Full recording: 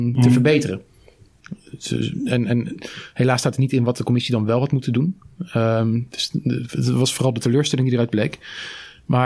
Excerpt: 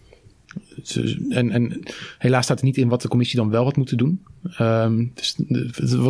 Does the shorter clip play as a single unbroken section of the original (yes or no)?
yes